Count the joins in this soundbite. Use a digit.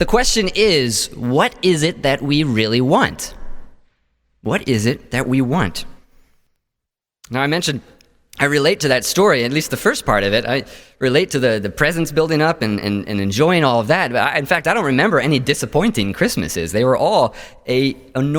0